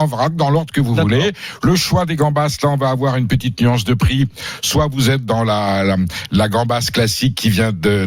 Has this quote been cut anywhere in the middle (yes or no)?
no